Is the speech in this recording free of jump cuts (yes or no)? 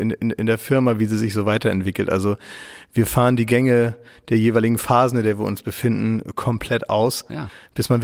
yes